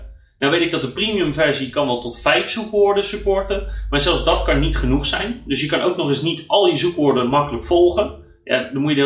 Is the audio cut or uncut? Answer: uncut